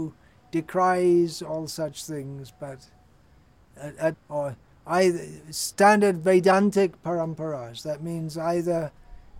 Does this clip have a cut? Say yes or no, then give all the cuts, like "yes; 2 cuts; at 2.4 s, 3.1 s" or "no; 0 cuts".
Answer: yes; 1 cut; at 4.1 s